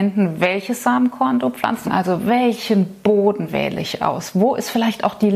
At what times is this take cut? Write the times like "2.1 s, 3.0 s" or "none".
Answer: 1.8 s